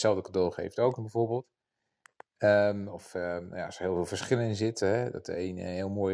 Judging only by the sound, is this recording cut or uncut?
uncut